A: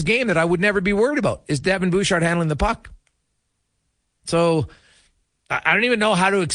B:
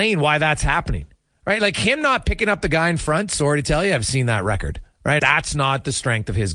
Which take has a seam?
B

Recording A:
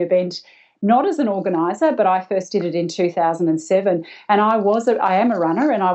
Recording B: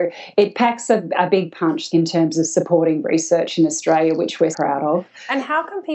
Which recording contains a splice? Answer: B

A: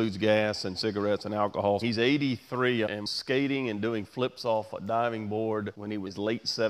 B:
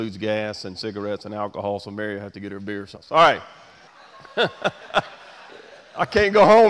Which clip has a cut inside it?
A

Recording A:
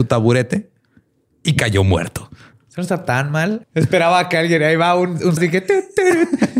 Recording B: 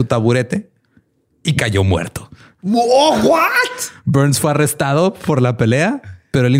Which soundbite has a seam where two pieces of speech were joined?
A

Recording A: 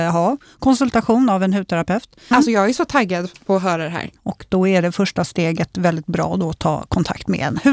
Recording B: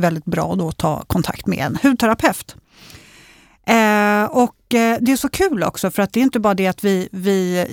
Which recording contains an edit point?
A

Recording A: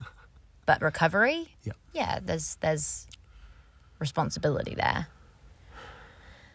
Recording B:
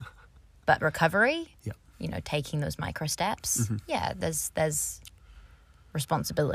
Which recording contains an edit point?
A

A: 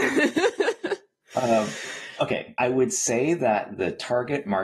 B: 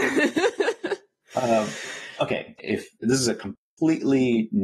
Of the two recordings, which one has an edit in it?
B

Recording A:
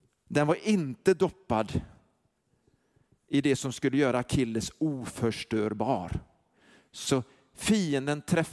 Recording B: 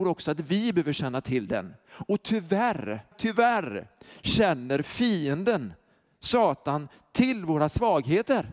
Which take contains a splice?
B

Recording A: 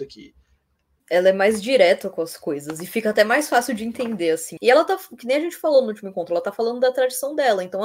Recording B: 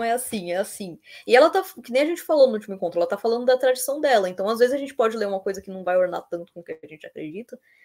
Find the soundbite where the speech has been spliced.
A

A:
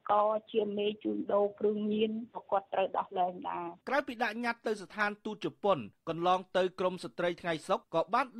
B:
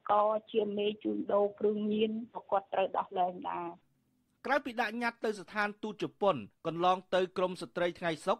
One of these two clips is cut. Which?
A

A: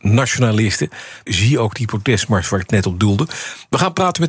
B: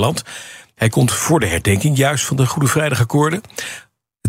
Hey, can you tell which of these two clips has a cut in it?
A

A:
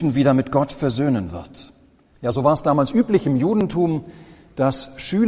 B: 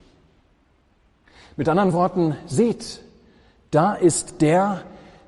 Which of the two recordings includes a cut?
A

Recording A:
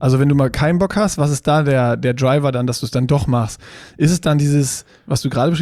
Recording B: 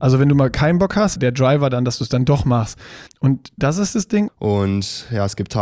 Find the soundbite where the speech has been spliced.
B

